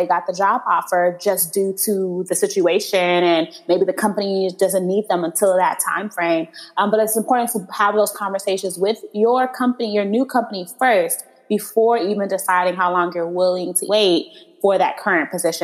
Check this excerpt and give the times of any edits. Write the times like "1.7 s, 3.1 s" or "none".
13.9 s